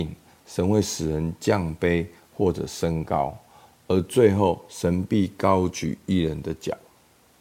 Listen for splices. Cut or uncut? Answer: uncut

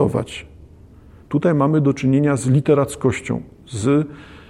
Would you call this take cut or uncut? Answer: cut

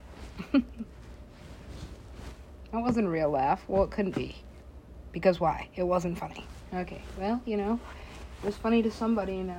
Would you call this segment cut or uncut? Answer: uncut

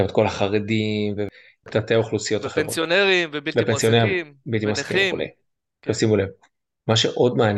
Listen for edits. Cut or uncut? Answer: uncut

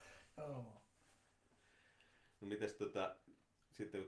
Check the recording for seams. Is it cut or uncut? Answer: uncut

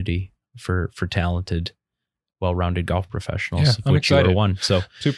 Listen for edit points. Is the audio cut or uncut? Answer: uncut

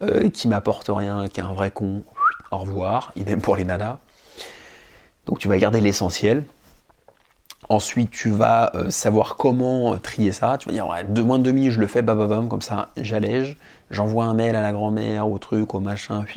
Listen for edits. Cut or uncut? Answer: uncut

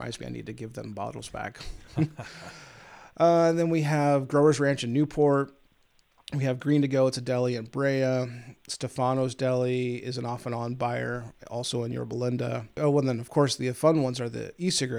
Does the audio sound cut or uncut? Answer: uncut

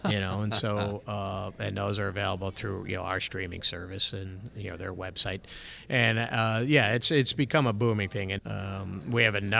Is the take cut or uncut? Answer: cut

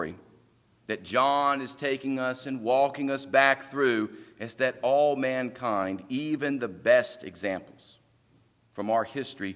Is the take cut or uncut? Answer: uncut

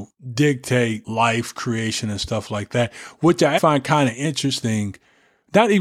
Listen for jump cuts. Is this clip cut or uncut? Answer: cut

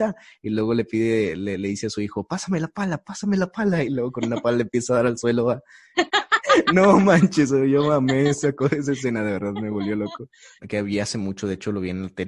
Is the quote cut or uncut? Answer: cut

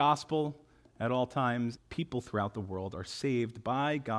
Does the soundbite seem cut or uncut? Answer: cut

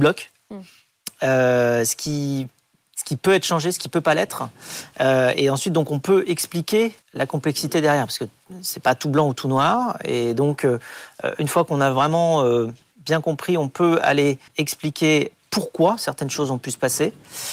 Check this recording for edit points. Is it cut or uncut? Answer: cut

